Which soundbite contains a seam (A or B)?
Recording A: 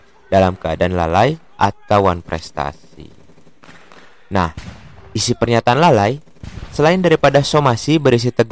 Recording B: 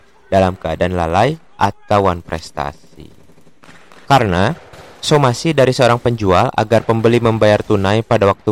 B